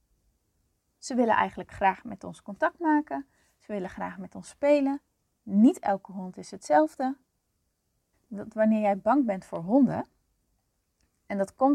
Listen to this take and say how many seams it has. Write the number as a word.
two